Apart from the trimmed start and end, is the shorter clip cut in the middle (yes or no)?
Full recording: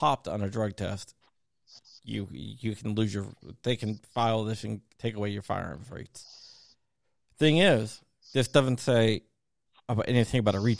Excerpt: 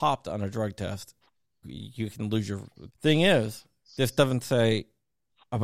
yes